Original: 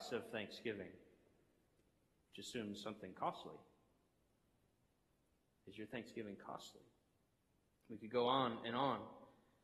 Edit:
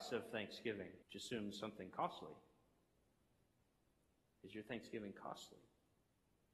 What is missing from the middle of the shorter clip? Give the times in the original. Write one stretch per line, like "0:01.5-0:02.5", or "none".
0:01.0-0:02.3